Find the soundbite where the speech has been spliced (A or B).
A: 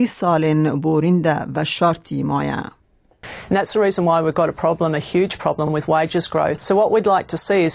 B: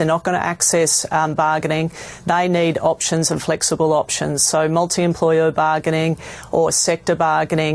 A